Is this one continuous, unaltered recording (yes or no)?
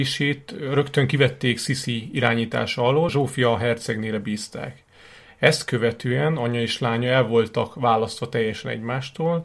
no